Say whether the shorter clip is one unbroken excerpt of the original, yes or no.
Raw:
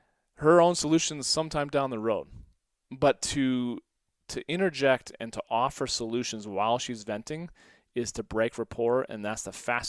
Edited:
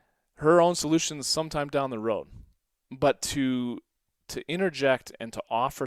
yes